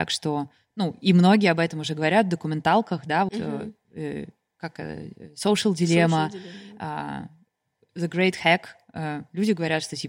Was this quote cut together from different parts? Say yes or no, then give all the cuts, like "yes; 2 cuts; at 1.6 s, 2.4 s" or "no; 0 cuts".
yes; 1 cut; at 3.3 s